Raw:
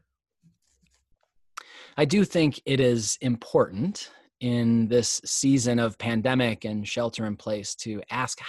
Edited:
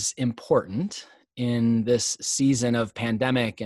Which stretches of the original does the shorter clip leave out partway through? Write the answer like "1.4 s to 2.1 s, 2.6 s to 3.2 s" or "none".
none